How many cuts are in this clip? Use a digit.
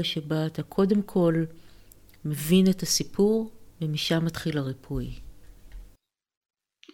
1